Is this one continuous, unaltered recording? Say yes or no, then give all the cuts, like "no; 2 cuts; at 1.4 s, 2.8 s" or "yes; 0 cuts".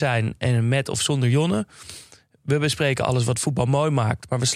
yes; 0 cuts